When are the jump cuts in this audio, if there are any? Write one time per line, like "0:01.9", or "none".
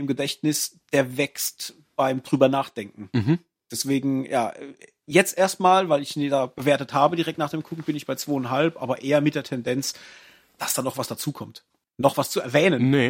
none